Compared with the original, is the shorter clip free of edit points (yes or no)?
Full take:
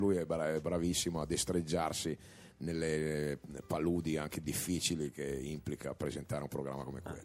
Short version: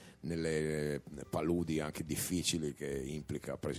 yes